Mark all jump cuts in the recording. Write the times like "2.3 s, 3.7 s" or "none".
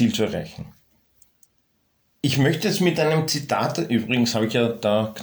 none

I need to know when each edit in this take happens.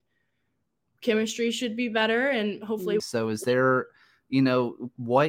3.0 s

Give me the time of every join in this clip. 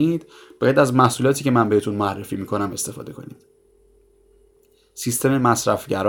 none

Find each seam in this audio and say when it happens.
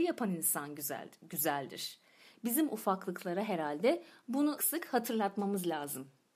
4.6 s

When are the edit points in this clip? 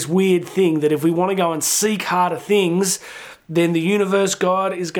none

